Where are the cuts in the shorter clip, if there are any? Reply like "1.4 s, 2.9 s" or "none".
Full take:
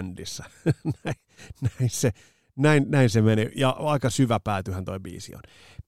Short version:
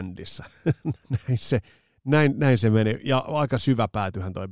1.0 s